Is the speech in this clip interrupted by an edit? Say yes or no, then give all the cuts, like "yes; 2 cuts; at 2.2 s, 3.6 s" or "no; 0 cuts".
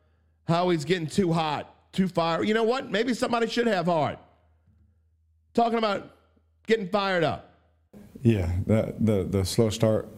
no; 0 cuts